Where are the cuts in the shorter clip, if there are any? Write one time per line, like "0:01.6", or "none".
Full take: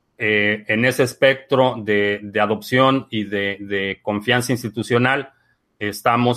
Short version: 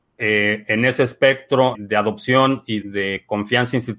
0:01.7
0:02.8